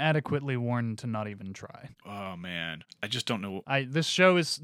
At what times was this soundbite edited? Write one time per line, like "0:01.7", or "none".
0:02.0